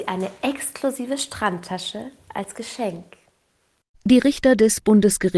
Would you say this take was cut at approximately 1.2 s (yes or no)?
no